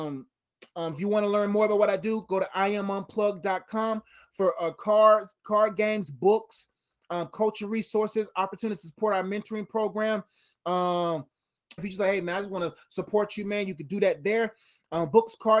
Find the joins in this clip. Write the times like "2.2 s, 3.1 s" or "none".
0.9 s, 11.8 s